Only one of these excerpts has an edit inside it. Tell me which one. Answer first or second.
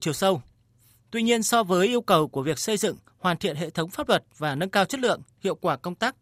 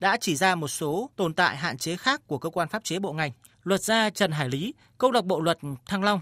second